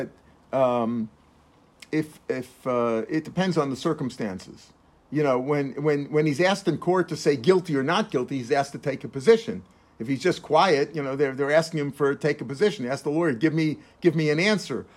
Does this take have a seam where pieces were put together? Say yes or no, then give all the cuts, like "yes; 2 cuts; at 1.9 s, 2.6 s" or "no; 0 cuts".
no; 0 cuts